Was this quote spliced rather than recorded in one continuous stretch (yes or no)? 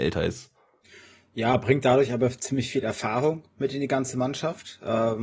no